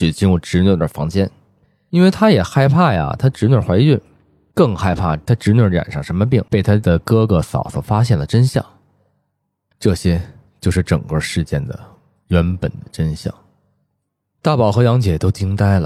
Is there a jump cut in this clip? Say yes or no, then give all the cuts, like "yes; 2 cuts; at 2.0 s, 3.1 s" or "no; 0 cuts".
no; 0 cuts